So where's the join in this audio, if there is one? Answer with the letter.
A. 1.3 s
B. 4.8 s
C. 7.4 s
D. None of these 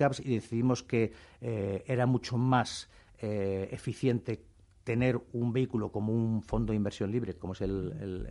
D